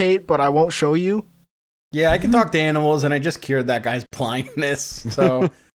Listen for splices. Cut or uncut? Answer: uncut